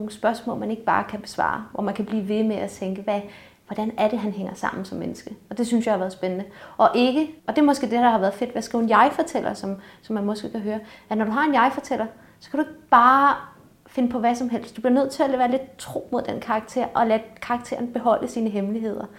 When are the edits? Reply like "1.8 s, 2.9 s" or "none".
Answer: 7.4 s